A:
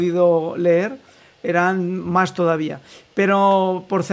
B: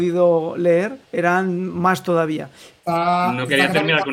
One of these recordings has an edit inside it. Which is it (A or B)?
B